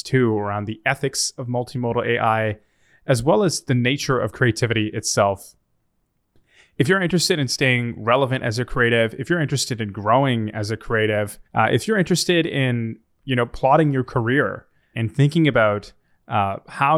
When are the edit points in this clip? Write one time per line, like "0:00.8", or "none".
0:11.4
0:14.9